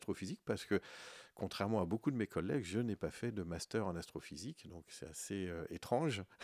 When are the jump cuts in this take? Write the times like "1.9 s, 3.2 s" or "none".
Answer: none